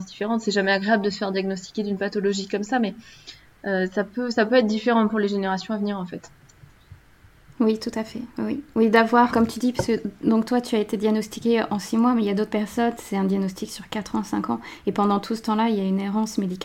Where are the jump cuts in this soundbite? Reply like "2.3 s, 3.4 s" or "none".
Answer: 9.3 s